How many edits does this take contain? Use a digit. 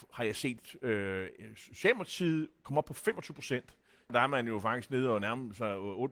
1